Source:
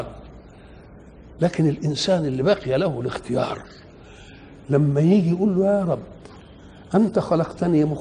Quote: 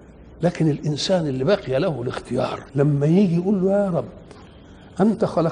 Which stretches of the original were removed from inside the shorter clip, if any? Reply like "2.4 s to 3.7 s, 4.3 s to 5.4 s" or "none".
3.7 s to 4.6 s